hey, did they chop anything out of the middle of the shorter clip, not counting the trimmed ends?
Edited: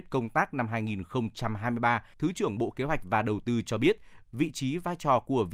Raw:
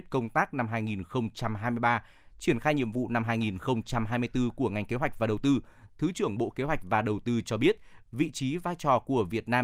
yes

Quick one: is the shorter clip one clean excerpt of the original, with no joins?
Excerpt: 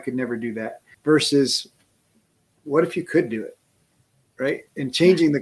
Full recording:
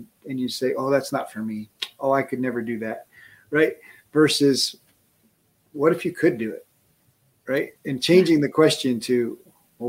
no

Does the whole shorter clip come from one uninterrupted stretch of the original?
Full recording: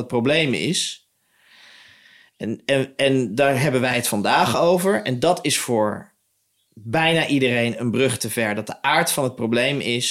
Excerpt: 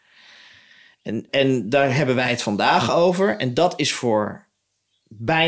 no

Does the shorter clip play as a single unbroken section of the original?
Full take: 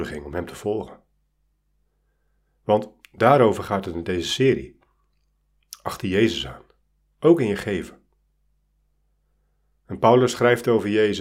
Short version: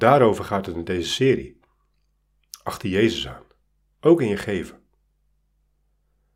yes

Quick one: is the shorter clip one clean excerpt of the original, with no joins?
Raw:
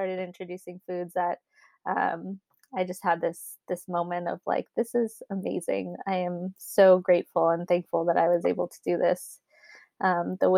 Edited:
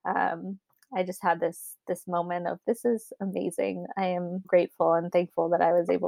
no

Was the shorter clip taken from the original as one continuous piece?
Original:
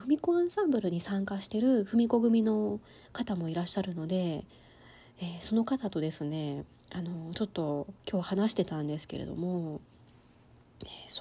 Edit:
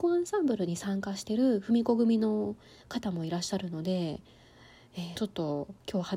no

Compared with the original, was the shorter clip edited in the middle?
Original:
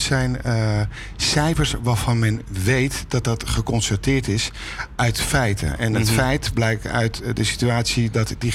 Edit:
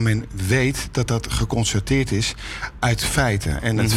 no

